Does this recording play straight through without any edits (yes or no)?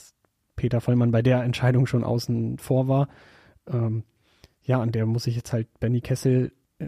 yes